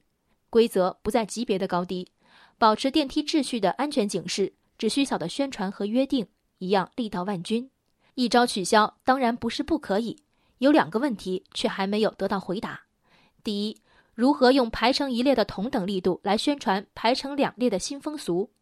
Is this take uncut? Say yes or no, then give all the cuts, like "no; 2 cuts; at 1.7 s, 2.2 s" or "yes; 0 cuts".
no; 2 cuts; at 5.1 s, 8.1 s